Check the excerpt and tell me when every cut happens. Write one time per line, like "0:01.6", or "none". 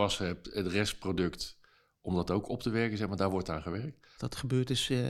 0:04.2